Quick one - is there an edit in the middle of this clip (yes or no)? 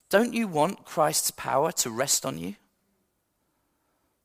no